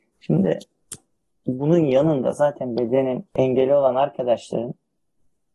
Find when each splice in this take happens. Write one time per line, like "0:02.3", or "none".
0:03.3